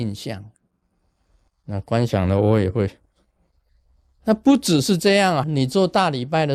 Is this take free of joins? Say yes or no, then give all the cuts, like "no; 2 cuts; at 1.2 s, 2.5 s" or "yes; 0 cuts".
no; 2 cuts; at 1.5 s, 5.4 s